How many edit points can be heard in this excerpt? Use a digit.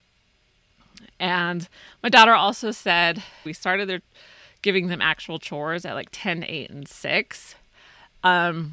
1